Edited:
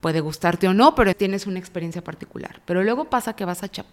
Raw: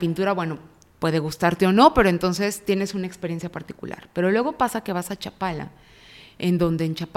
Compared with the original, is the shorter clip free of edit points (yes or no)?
no